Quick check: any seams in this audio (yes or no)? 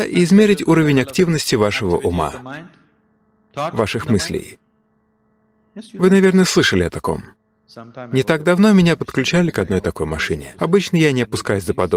no